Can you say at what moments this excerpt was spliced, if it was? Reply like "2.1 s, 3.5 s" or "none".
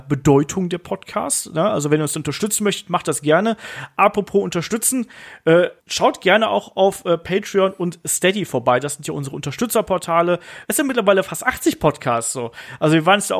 5.8 s, 10.6 s